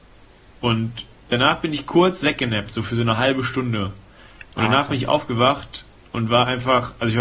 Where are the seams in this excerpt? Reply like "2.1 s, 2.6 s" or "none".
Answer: none